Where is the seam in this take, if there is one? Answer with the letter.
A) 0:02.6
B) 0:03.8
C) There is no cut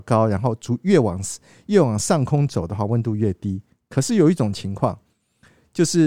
C